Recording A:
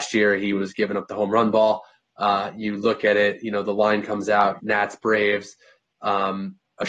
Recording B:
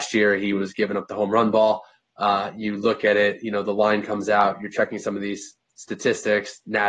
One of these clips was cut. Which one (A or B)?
A